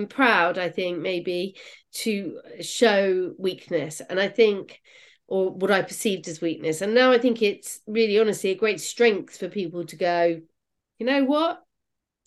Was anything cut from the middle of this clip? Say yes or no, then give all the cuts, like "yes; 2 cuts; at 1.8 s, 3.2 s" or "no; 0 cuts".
no; 0 cuts